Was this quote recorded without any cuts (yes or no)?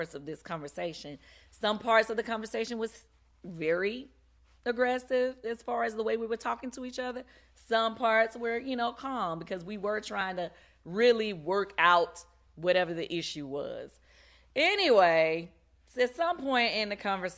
yes